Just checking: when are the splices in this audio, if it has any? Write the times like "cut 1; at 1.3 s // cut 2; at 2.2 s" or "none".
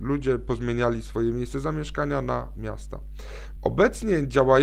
cut 1; at 3.6 s